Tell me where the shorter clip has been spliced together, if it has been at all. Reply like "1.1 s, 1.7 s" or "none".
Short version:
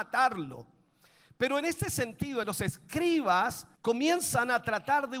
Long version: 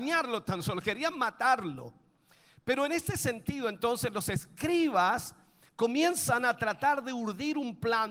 2.4 s, 3.8 s